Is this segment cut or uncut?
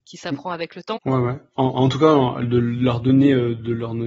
cut